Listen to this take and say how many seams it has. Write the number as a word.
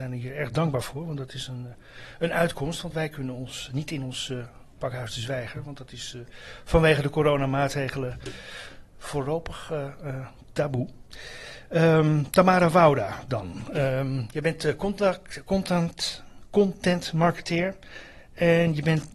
one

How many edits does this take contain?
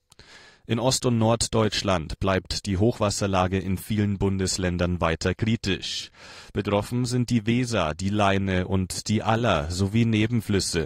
zero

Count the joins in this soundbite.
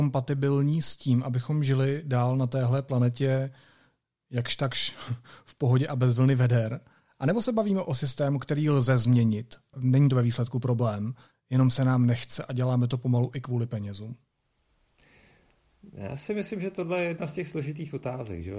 zero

